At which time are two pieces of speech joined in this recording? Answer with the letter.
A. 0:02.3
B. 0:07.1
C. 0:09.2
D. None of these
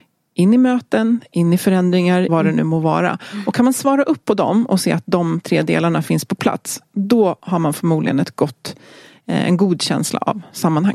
A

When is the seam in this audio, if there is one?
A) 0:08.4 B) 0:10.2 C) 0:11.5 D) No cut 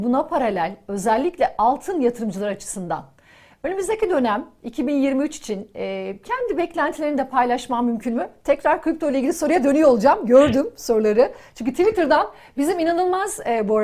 D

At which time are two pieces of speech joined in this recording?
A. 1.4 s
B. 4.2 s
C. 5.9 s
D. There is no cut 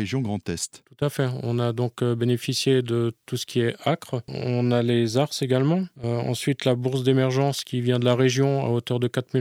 B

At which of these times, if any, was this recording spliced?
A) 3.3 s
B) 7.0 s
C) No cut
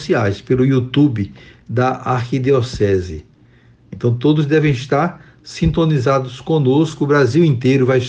C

